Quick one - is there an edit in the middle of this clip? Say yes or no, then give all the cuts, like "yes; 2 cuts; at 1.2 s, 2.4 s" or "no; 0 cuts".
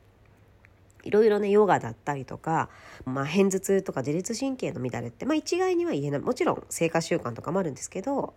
yes; 1 cut; at 3.1 s